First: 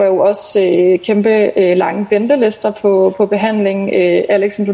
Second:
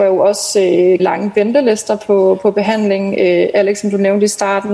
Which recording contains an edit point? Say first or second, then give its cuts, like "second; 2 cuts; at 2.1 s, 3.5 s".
second; 1 cut; at 1.0 s